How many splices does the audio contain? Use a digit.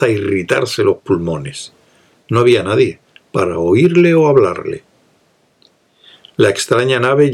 1